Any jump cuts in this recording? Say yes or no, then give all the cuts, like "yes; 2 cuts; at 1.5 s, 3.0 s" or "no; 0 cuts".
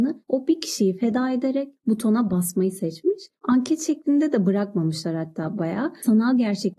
yes; 1 cut; at 5.6 s